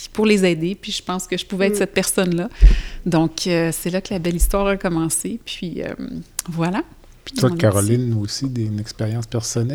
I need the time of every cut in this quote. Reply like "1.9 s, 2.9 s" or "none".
none